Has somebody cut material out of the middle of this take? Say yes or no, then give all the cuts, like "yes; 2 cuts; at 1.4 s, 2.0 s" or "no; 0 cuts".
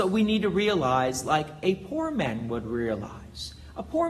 no; 0 cuts